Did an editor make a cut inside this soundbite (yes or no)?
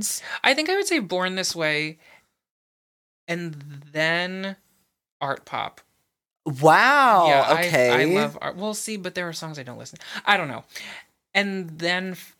no